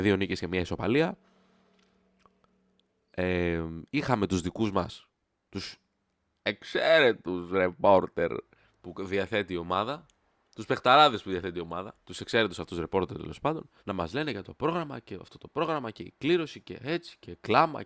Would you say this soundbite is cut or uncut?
cut